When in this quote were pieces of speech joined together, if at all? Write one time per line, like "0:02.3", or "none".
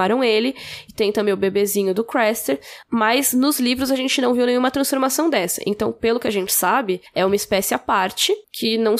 none